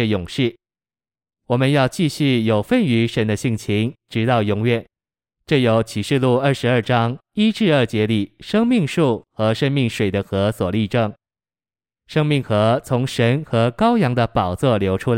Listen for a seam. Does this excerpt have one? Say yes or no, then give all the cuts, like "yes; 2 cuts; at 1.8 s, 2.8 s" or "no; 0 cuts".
no; 0 cuts